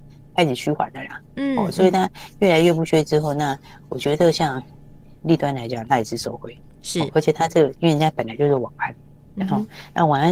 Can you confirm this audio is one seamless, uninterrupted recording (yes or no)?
yes